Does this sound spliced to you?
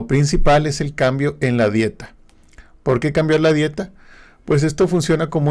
no; 0 cuts

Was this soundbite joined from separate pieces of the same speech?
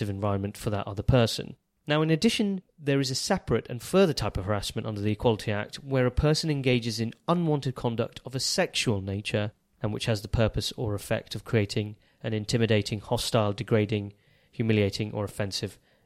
no; 0 cuts

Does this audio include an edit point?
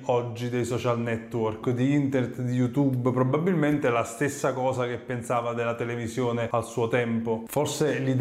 yes; 1 cut; at 1.6 s

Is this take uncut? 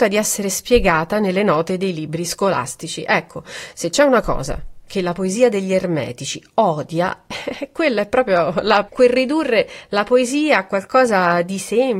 no; 1 cut; at 8.9 s

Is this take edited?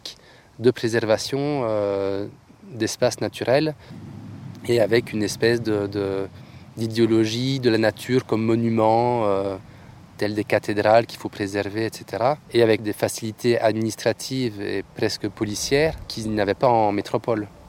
yes; 1 cut; at 12.4 s

